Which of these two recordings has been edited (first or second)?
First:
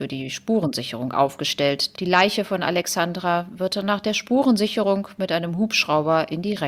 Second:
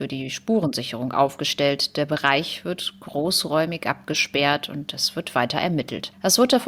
first